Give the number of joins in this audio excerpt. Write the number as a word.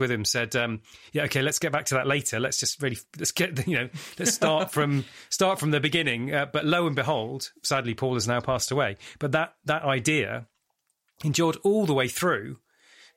zero